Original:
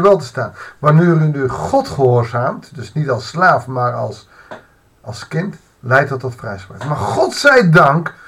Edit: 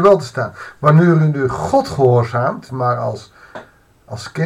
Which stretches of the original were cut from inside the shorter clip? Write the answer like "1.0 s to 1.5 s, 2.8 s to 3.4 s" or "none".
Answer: 2.7 s to 3.7 s